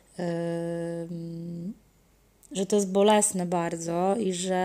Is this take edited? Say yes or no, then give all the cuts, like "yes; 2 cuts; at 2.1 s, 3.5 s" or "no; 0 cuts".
no; 0 cuts